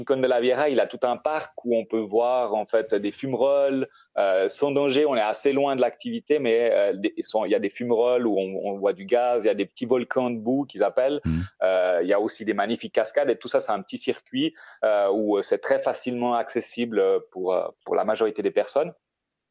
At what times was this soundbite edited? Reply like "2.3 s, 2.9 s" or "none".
17.8 s

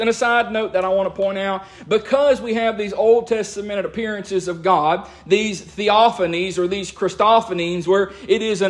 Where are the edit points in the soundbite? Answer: none

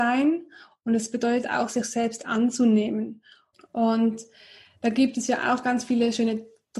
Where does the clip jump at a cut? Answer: 3.5 s

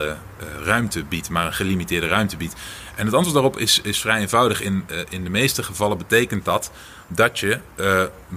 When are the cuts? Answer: none

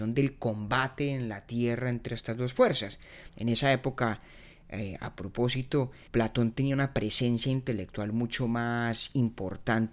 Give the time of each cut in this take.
3.3 s, 6.1 s

